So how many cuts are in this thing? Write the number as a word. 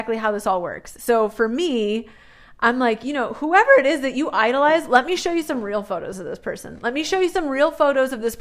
zero